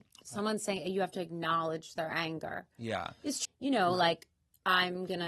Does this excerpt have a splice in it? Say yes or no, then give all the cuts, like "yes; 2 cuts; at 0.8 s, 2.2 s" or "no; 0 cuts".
yes; 1 cut; at 3.4 s